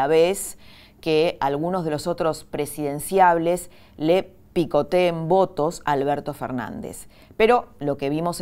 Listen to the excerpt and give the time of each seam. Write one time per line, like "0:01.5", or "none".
none